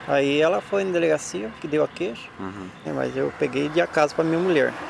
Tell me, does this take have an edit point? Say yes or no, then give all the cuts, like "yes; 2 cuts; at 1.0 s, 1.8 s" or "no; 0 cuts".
yes; 2 cuts; at 1.6 s, 2.8 s